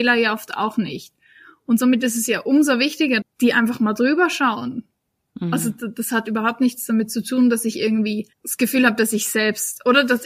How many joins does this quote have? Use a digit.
2